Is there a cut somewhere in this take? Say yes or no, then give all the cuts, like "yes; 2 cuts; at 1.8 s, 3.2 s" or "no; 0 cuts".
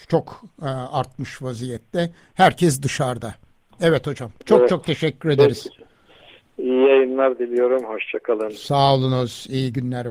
no; 0 cuts